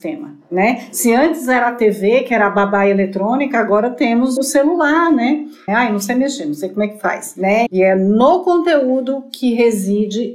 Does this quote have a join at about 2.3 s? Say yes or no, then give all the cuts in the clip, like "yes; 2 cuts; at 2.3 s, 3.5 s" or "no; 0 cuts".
no; 3 cuts; at 4.4 s, 5.7 s, 7.7 s